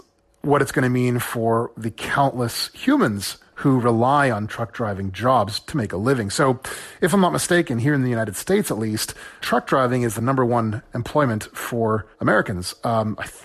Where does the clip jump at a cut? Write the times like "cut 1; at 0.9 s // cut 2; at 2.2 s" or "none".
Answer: cut 1; at 9.4 s // cut 2; at 12.1 s